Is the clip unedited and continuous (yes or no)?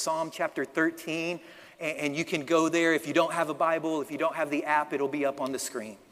yes